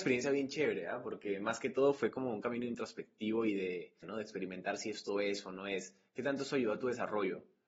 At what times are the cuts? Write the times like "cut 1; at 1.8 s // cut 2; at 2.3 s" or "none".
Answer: cut 1; at 4.0 s